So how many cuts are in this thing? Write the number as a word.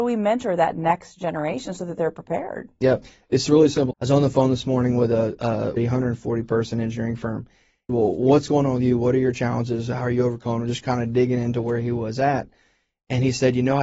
three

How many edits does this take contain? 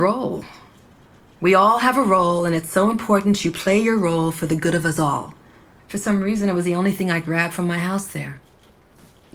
one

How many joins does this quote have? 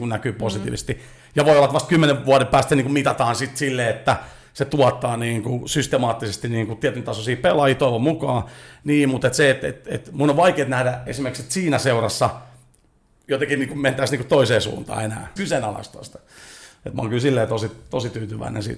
one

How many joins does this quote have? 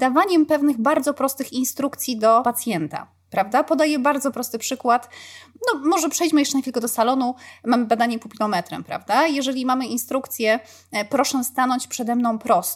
zero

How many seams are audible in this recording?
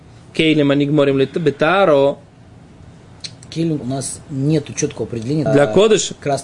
two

